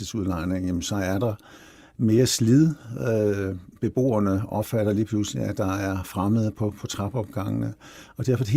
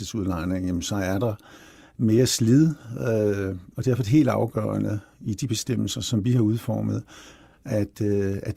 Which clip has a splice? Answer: second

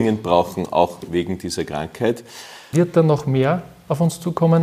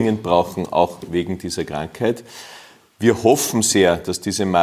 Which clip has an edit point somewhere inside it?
first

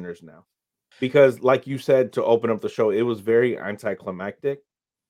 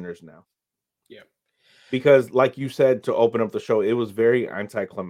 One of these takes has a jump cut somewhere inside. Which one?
first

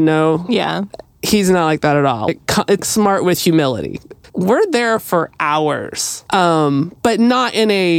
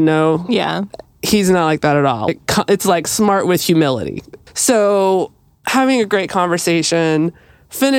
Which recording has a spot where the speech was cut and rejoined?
first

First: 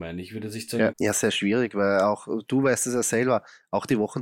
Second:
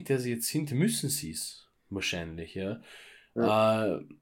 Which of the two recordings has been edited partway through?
first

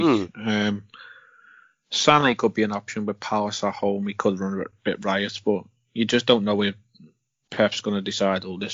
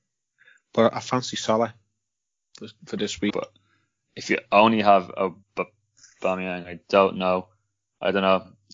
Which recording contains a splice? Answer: second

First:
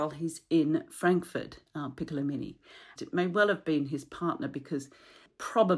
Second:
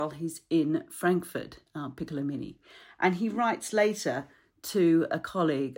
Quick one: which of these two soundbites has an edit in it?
first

